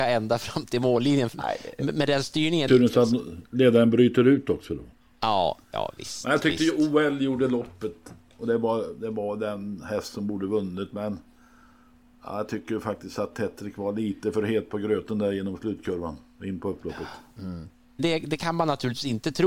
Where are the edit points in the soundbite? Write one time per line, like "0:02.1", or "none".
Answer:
0:02.7
0:18.0